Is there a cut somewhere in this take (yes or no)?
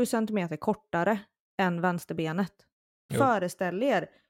yes